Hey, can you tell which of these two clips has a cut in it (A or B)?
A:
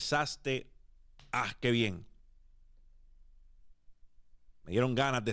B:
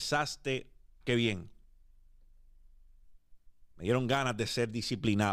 B